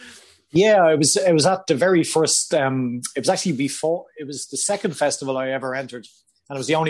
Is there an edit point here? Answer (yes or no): no